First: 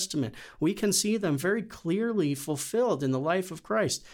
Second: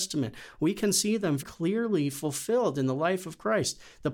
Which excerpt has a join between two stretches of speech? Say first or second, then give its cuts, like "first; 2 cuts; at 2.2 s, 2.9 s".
second; 1 cut; at 1.4 s